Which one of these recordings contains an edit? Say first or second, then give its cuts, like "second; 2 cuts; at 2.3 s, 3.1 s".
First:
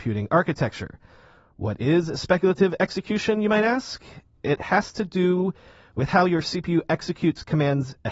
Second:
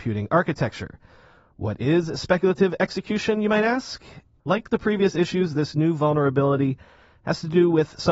second; 1 cut; at 4.4 s